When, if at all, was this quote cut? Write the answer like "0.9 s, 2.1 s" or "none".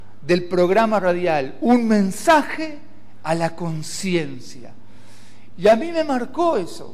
5.5 s